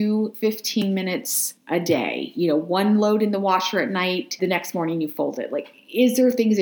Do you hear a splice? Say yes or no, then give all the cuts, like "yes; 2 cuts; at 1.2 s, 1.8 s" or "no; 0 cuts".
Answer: yes; 1 cut; at 4.4 s